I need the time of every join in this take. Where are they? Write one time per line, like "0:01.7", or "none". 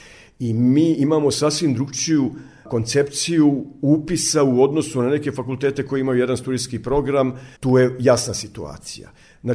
0:07.6

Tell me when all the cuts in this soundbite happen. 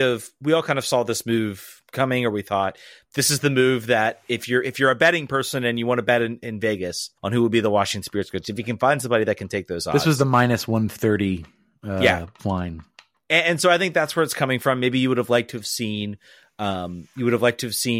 0:07.2

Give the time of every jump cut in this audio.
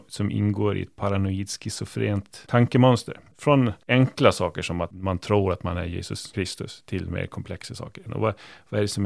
0:03.3
0:08.1

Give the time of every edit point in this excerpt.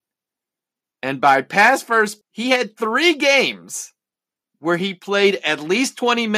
0:02.2

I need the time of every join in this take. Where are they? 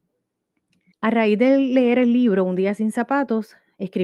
0:00.9

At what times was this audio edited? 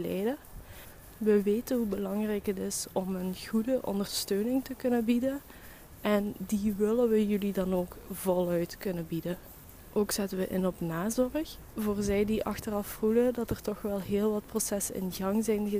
none

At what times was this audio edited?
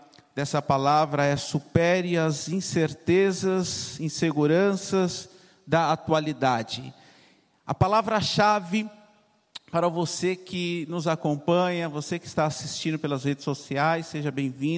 none

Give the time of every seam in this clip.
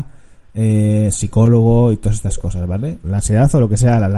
0:01.1
0:03.0

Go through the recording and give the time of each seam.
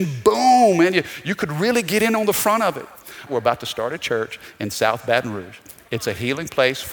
0:03.3

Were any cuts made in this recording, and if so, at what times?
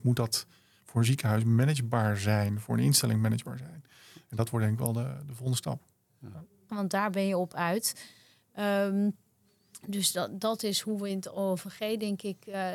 0:06.7

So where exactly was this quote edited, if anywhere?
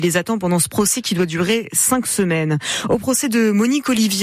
none

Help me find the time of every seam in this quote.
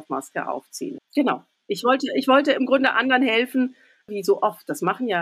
0:01.0
0:04.1

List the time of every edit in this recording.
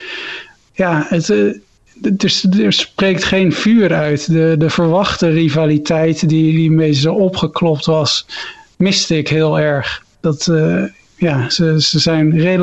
none

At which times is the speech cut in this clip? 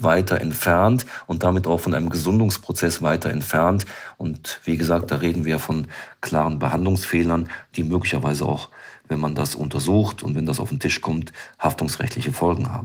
none

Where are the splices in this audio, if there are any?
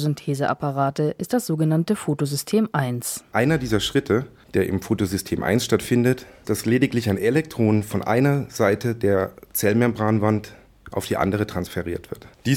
0:03.3
0:06.4

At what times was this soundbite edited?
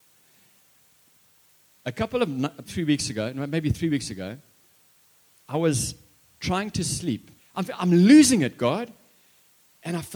0:02.7
0:07.4

